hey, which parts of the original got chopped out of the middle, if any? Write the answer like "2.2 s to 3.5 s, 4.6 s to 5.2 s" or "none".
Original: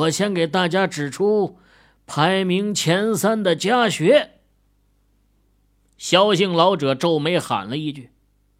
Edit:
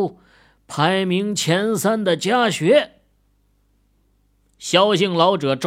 none